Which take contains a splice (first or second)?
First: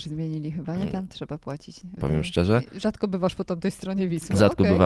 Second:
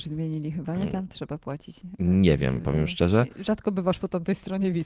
first